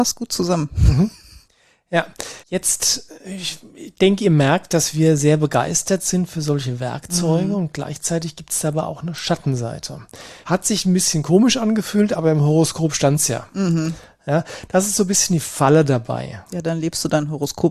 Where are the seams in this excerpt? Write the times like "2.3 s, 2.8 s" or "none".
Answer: 2.4 s, 10.4 s